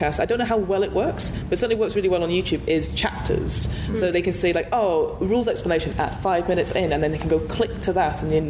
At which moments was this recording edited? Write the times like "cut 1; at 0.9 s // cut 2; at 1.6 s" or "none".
cut 1; at 4.1 s